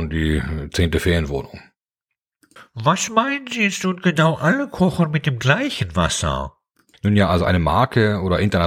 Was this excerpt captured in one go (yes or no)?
yes